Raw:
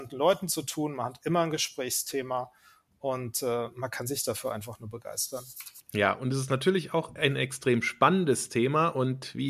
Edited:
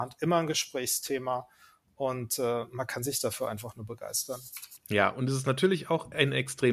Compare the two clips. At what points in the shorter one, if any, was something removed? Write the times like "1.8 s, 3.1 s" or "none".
none